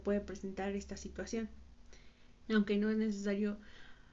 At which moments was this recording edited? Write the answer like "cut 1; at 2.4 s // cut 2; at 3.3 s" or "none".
cut 1; at 2.5 s